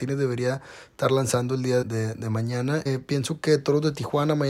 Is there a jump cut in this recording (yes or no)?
yes